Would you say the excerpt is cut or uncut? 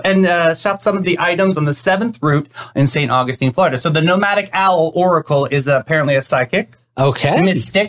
uncut